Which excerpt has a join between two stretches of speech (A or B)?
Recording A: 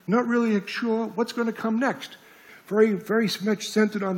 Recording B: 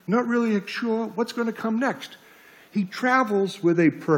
A